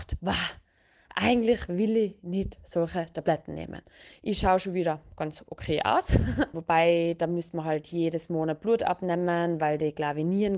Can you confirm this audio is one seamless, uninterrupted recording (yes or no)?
no